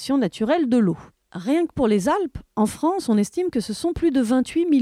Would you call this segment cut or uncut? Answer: uncut